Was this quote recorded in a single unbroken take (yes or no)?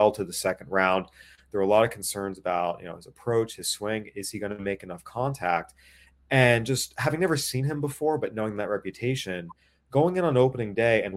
yes